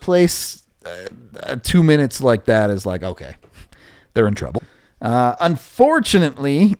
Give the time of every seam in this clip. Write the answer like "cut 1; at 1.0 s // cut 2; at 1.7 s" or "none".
cut 1; at 4.5 s